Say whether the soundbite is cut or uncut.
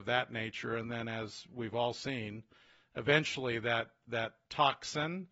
uncut